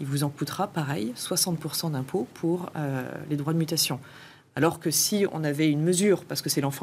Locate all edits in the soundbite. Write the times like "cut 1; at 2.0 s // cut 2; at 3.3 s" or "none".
none